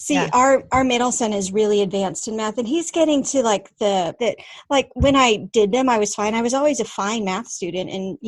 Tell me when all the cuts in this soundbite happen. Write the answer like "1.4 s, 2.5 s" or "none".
4.2 s